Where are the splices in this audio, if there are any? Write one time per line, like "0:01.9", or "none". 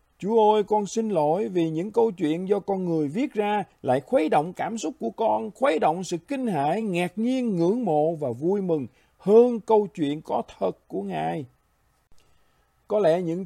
none